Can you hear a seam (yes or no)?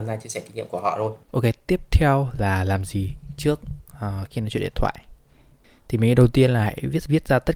yes